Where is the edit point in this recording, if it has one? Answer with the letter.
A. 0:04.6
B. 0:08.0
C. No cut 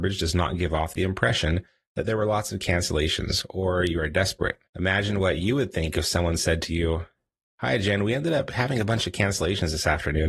A